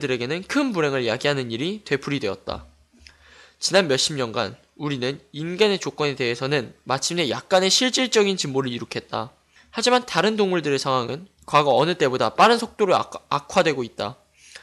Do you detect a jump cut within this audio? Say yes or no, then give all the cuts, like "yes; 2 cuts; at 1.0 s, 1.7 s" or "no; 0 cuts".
yes; 1 cut; at 9.6 s